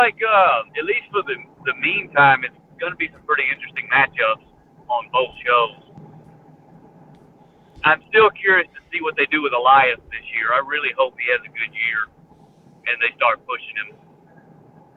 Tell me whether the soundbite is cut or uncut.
uncut